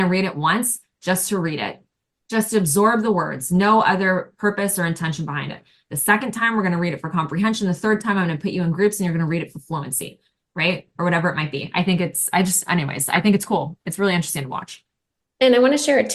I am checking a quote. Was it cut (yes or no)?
no